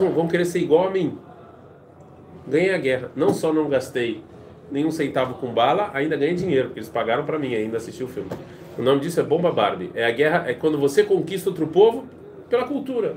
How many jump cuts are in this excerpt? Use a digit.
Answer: 1